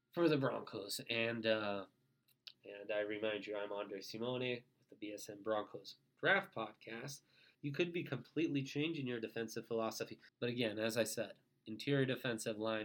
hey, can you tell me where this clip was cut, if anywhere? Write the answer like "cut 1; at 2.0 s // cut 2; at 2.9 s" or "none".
cut 1; at 2.5 s // cut 2; at 7.5 s // cut 3; at 10.3 s